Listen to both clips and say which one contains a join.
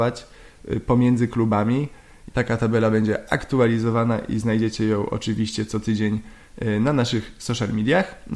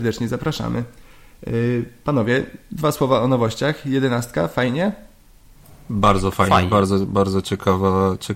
first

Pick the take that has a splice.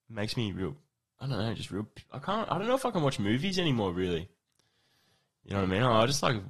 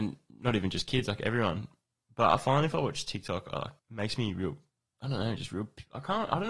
second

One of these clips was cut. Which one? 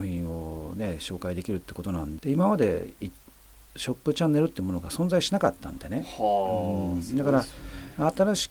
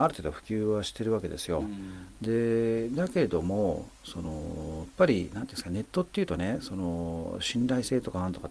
first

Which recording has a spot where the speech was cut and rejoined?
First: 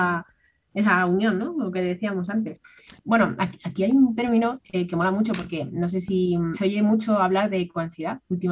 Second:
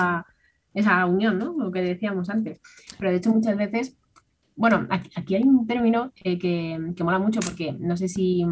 first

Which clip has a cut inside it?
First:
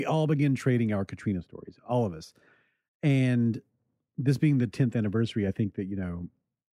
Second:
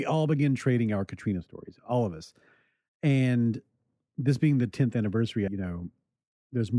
second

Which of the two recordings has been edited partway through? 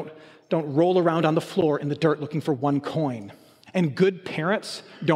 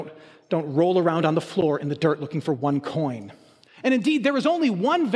second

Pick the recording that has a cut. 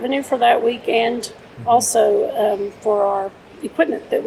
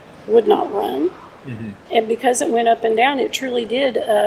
second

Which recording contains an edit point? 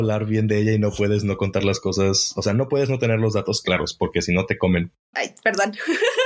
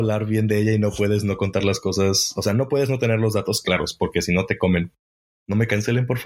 first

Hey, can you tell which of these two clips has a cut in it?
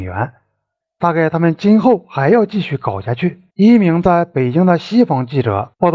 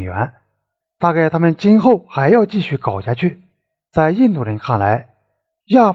first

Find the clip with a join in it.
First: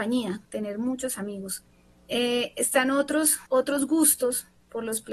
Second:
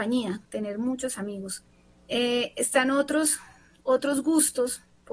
first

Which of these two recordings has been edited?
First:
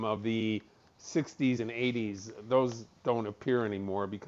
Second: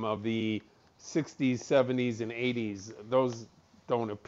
first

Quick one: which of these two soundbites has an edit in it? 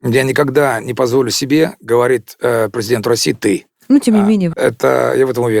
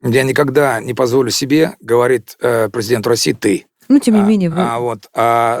first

